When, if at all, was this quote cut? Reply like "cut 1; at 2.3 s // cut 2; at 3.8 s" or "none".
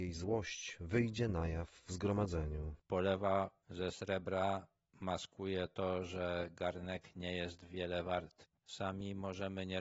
cut 1; at 2.8 s // cut 2; at 8.6 s